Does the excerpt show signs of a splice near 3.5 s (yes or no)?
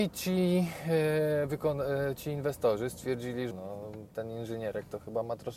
yes